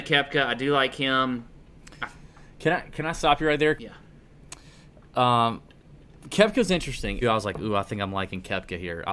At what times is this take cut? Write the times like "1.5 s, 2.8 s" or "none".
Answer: 3.8 s, 7.2 s